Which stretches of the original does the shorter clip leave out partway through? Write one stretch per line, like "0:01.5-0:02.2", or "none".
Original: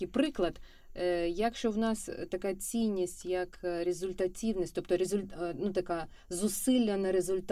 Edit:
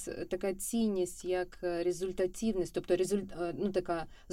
none